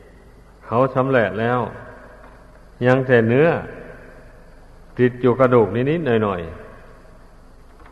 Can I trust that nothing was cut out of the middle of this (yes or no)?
yes